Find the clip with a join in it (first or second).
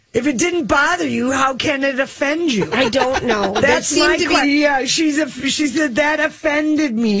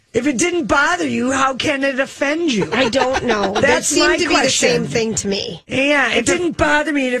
first